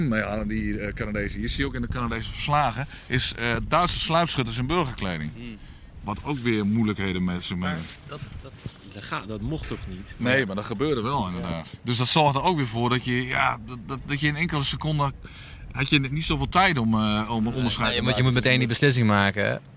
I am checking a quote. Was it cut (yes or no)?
no